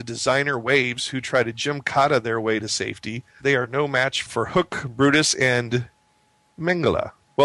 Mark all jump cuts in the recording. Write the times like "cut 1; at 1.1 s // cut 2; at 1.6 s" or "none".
cut 1; at 3.4 s